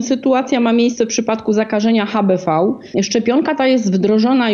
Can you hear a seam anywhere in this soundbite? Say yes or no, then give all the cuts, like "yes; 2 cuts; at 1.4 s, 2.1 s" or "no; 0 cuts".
yes; 1 cut; at 2.9 s